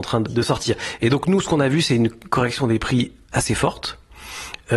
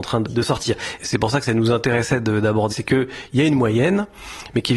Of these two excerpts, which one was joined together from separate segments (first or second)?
second